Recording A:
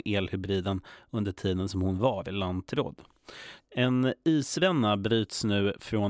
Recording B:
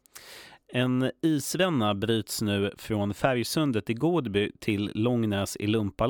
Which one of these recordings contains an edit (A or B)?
A